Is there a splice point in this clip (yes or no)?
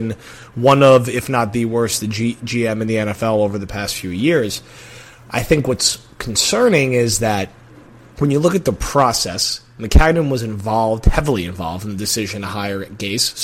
no